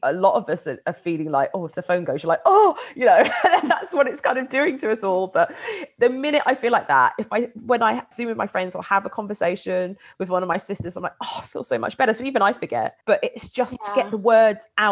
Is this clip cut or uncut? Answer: cut